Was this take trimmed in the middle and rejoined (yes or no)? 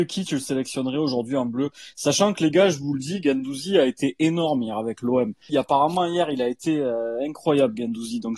yes